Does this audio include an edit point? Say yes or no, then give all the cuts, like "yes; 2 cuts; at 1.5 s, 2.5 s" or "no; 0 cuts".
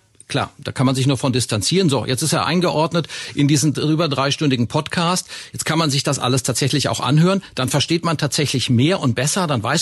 no; 0 cuts